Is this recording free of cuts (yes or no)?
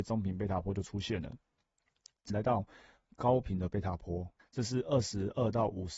no